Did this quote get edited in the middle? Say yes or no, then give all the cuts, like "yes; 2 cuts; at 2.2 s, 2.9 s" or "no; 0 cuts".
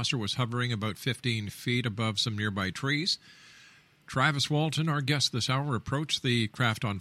no; 0 cuts